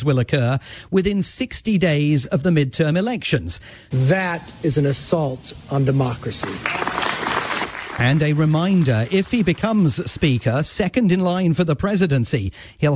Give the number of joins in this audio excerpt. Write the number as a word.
one